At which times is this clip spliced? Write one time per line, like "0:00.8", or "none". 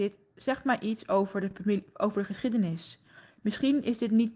none